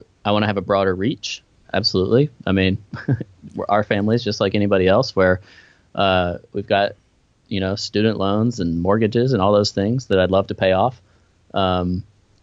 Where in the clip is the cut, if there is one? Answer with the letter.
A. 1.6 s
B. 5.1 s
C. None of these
A